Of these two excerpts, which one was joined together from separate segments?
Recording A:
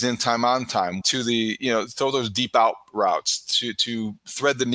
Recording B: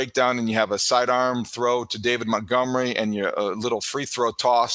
A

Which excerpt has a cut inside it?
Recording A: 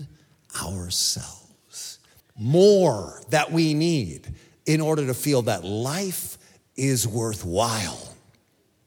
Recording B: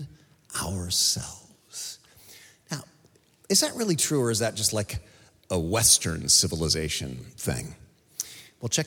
A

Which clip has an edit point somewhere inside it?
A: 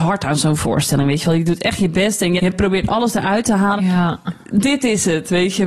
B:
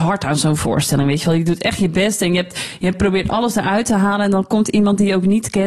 A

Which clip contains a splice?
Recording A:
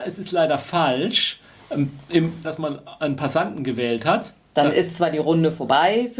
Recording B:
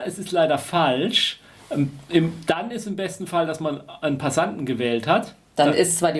A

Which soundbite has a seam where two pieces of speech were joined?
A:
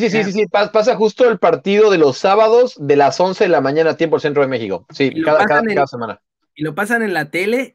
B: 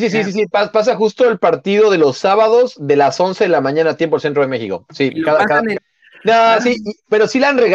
B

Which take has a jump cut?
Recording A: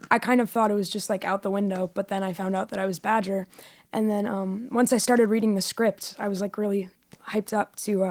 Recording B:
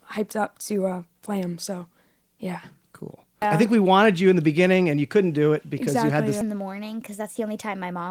B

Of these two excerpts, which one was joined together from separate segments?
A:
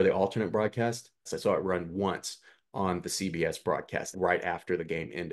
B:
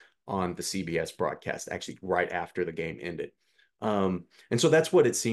A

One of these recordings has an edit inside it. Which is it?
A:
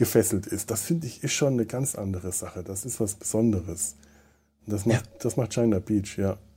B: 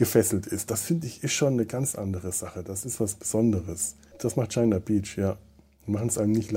B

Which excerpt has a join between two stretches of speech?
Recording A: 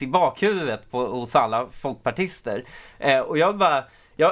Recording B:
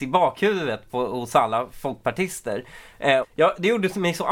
B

